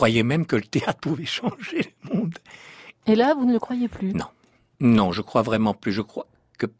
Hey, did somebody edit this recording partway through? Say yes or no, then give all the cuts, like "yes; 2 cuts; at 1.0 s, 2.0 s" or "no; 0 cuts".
no; 0 cuts